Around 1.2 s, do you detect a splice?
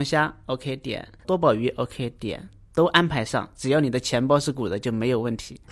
no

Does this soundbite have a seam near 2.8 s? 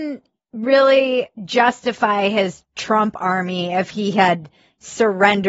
no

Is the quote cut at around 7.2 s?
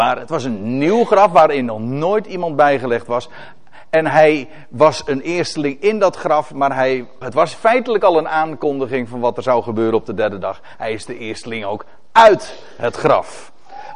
yes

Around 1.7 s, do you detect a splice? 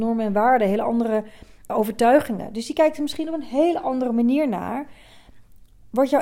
yes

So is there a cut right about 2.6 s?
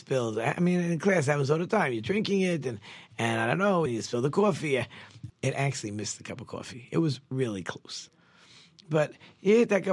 no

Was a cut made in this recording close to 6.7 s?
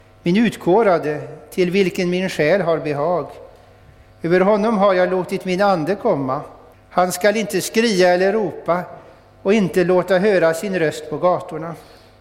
yes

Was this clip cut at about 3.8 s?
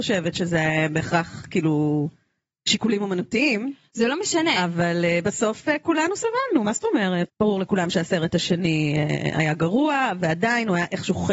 no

